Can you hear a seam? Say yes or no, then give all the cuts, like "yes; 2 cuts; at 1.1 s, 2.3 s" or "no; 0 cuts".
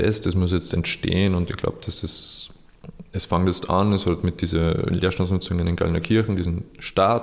no; 0 cuts